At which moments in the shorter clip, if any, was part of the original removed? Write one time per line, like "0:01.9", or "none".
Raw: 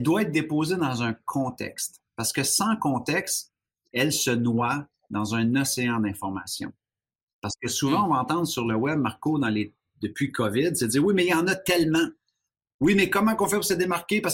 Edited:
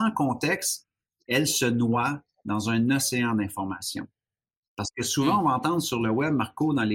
none